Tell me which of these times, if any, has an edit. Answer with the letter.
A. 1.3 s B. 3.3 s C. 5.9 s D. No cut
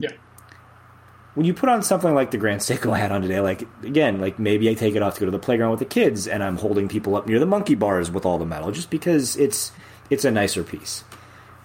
D